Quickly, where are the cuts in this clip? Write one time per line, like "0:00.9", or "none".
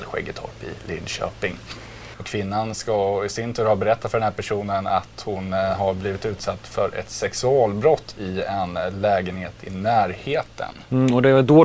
0:02.1